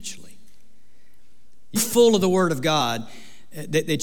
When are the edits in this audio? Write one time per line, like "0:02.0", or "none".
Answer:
0:01.8